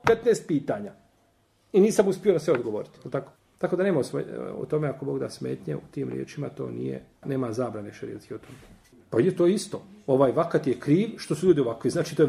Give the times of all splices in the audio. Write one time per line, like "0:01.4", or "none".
0:07.2